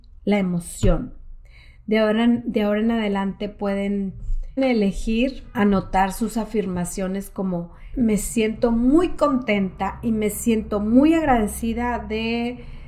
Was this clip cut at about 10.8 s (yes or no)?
no